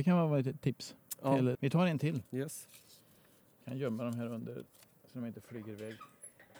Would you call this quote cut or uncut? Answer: cut